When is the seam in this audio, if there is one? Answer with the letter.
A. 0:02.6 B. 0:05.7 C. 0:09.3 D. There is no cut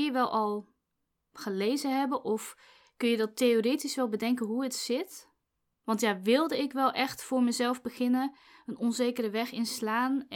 B